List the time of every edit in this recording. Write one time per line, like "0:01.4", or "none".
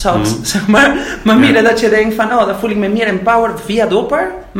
none

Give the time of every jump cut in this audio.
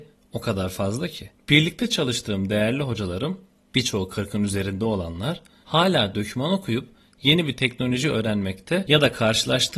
none

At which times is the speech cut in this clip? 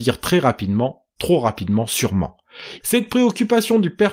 0:02.8

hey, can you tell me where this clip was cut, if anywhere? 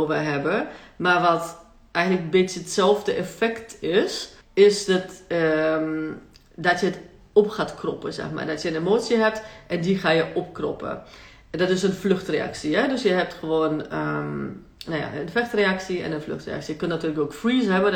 0:04.4

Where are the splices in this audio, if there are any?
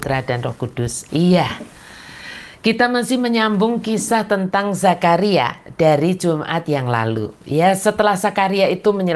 0:01.1

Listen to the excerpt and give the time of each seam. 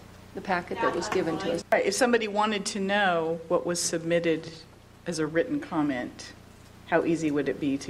0:01.6

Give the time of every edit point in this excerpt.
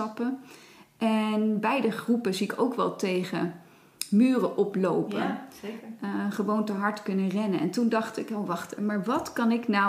0:08.8

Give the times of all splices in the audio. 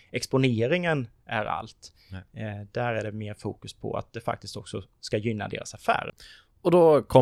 none

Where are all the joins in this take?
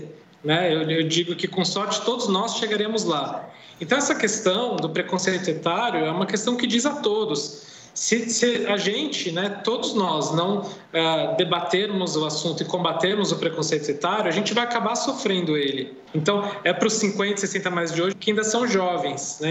0:16.1
0:18.1

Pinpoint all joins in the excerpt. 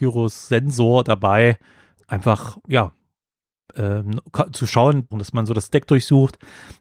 0:02.0
0:05.1

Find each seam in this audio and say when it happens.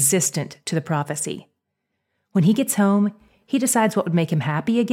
none

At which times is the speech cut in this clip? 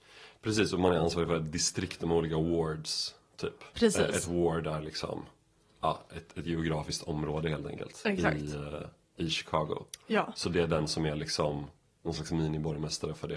none

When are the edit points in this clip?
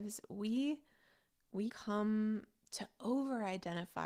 0:01.7

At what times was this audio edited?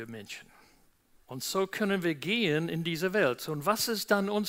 0:01.2

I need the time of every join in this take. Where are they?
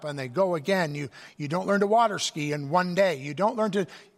none

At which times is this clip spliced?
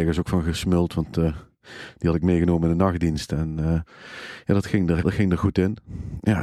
0:05.0

